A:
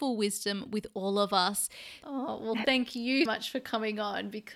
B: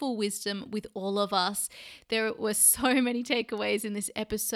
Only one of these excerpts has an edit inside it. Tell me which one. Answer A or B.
A